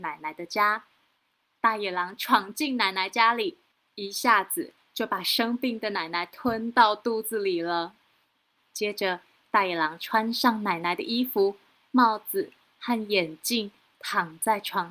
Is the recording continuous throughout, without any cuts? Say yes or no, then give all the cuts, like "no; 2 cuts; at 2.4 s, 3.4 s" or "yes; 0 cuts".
yes; 0 cuts